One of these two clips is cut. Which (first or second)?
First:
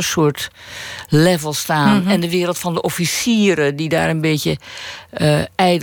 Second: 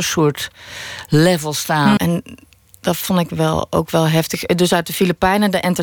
second